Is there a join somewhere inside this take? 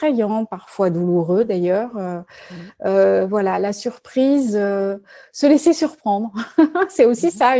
no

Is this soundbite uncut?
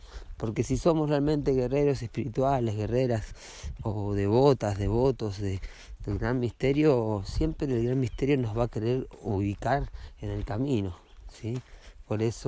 yes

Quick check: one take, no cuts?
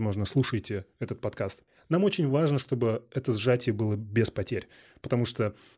yes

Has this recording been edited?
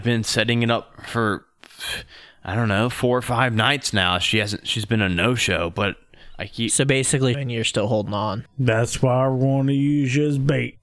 yes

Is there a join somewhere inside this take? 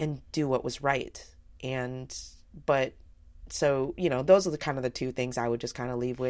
no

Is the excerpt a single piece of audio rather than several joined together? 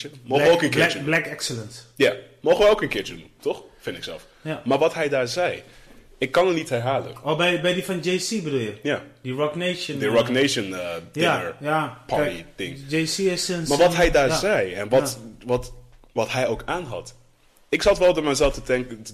yes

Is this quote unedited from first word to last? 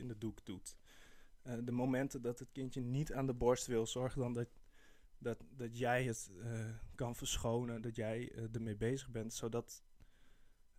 yes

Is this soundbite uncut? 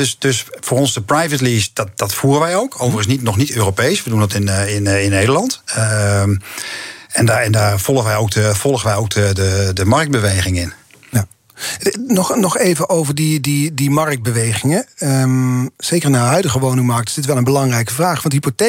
yes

